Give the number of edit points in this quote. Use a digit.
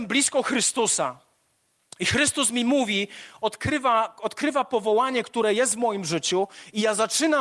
0